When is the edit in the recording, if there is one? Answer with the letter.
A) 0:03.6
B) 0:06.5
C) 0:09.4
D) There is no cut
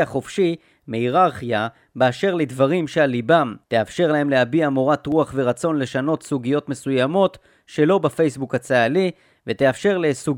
A